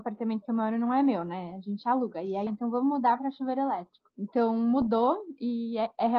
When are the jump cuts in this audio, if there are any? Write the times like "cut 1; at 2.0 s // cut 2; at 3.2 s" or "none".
cut 1; at 2.5 s // cut 2; at 4.1 s